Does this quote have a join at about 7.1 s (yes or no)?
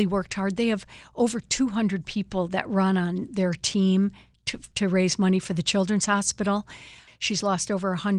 yes